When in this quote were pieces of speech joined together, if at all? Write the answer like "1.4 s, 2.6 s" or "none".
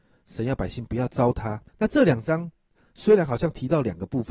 1.7 s